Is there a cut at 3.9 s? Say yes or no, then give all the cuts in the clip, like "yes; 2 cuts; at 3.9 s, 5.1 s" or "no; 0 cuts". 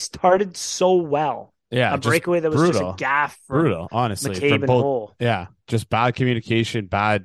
no; 1 cut; at 1.6 s